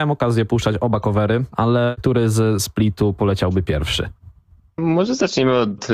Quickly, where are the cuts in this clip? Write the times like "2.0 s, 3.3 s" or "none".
1.5 s